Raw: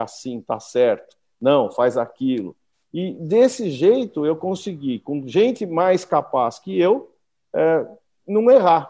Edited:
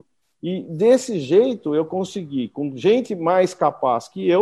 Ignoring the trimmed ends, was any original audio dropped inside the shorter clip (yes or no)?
no